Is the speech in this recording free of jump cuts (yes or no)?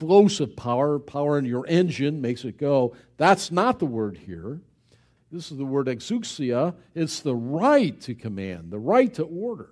no